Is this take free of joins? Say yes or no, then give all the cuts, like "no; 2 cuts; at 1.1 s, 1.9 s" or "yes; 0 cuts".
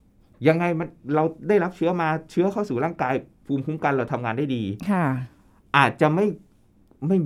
yes; 0 cuts